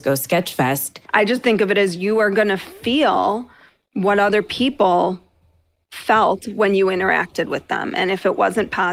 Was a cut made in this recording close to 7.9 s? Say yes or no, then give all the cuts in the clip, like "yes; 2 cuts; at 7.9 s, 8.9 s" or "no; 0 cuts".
no; 1 cut; at 1.1 s